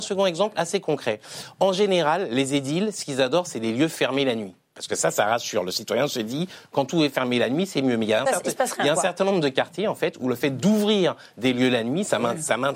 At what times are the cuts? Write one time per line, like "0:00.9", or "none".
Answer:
none